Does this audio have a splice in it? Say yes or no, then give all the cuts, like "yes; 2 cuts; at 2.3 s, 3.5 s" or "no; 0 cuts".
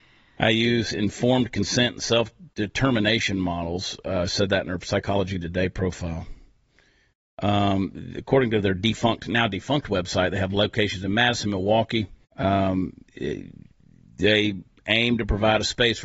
yes; 1 cut; at 12.2 s